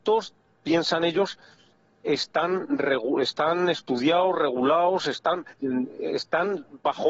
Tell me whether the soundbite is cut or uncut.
cut